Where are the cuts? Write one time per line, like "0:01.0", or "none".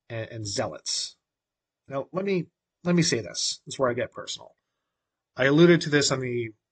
0:04.1